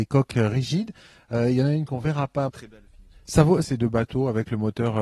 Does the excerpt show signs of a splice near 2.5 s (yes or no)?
yes